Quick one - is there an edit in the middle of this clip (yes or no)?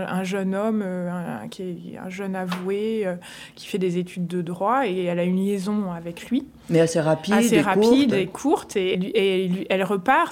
yes